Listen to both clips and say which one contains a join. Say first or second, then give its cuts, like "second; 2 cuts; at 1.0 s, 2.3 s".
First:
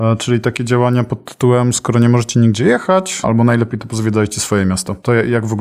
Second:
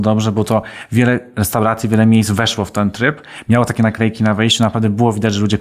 first; 1 cut; at 3.2 s